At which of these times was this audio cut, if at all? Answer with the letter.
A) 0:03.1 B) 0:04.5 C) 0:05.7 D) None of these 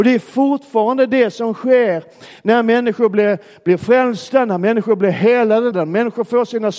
C